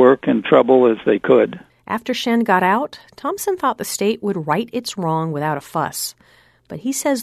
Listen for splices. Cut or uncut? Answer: cut